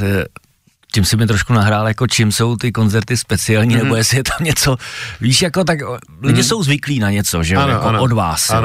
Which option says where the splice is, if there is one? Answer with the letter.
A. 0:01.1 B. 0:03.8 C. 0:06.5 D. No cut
D